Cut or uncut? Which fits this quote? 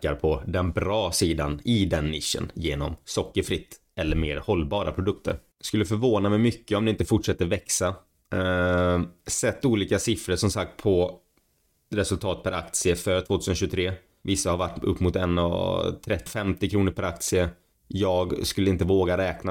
cut